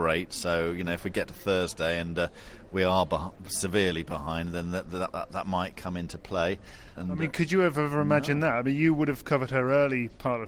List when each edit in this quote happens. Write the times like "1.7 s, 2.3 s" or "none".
7.0 s